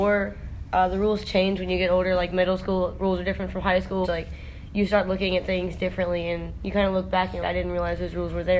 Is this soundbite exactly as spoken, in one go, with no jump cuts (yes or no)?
no